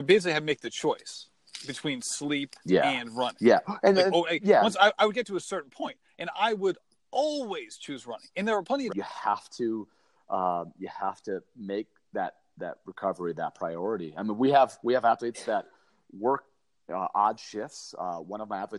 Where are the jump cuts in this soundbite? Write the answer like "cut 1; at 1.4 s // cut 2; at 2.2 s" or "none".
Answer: cut 1; at 8.9 s